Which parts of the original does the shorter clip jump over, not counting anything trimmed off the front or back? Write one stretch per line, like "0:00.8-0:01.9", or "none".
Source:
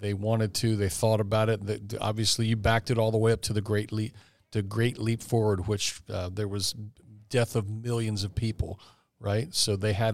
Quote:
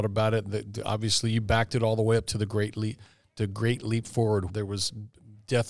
0:05.6-0:06.3